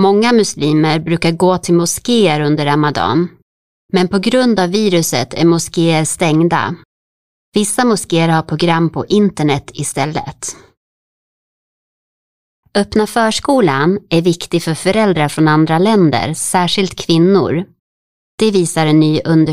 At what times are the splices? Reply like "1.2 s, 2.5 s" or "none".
none